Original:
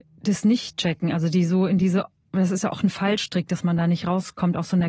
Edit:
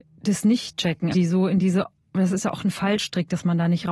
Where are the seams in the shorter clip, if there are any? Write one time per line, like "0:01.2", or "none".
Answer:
0:01.1